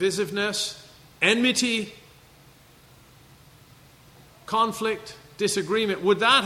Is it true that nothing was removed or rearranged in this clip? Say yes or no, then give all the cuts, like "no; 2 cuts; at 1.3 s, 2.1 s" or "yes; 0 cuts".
yes; 0 cuts